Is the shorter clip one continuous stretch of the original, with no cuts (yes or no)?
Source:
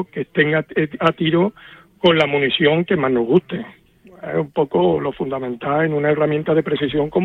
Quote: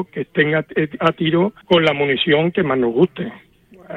no